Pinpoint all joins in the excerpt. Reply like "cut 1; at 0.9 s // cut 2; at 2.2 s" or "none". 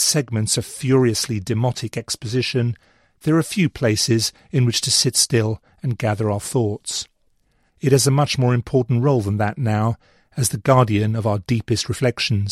cut 1; at 7.7 s